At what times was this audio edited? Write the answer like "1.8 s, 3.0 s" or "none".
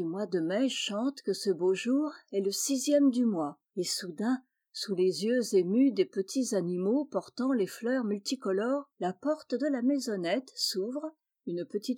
3.7 s